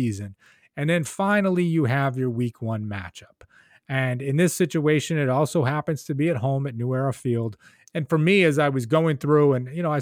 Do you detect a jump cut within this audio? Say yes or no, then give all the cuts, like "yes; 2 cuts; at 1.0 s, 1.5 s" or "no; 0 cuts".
yes; 1 cut; at 7.9 s